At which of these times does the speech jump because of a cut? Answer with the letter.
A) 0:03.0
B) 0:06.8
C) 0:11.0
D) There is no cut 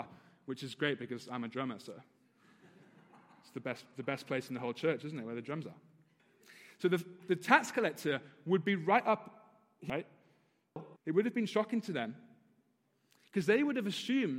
C